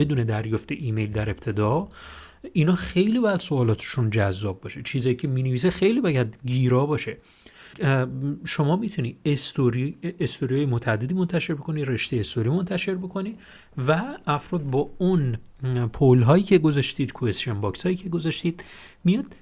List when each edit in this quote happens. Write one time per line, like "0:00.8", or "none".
0:07.7